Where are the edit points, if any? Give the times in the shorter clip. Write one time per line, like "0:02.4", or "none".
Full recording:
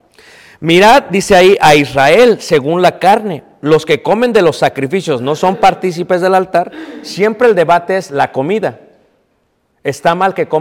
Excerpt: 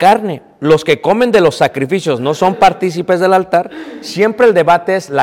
none